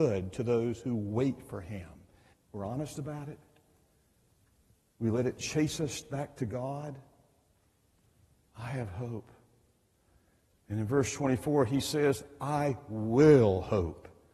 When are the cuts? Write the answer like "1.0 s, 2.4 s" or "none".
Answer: 2.3 s, 8.5 s

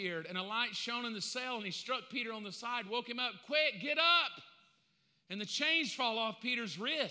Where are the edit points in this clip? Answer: none

